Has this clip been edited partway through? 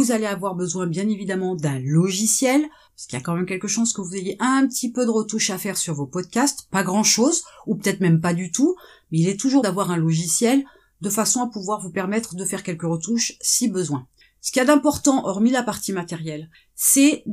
yes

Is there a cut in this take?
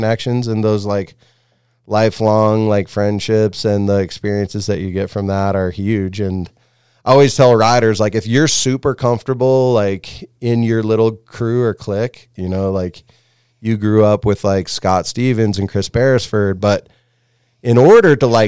yes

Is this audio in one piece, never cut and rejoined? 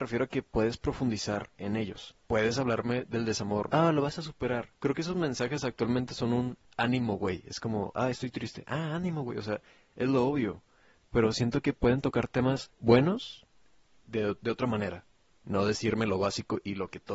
no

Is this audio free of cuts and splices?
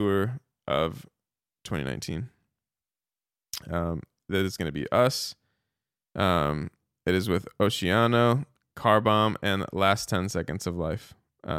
yes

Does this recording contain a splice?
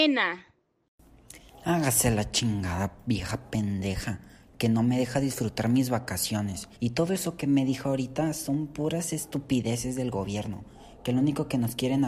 yes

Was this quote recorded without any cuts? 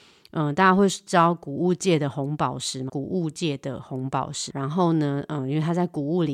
no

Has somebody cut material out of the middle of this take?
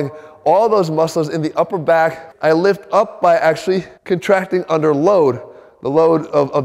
yes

